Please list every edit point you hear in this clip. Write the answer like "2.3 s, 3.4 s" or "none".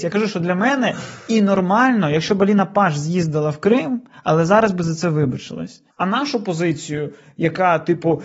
5.9 s